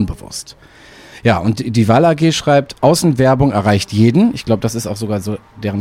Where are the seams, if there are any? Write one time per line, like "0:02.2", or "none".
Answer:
none